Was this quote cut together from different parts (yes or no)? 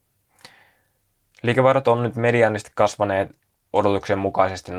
no